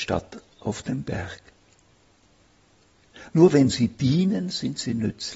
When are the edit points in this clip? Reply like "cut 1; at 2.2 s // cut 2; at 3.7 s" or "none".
cut 1; at 3.3 s

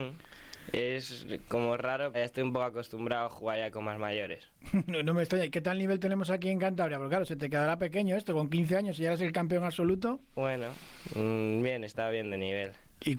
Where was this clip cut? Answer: cut 1; at 2.1 s

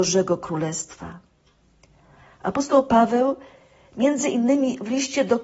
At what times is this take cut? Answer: none

